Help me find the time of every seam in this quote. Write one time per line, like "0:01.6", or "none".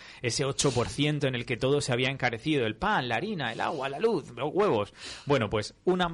none